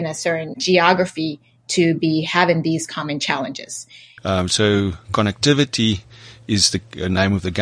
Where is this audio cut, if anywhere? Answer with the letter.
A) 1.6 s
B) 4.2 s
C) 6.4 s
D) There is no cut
B